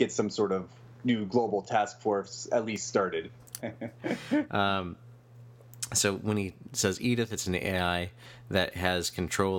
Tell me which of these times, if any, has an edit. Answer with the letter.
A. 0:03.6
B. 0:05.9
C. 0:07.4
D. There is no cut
A